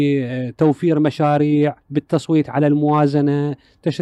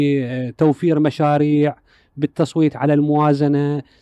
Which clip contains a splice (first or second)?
first